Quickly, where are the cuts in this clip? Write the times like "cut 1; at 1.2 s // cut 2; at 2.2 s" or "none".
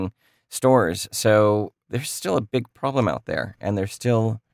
none